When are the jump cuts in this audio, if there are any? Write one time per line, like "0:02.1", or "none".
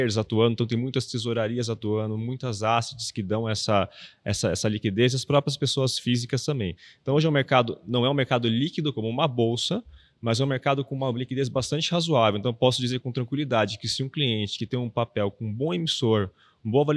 none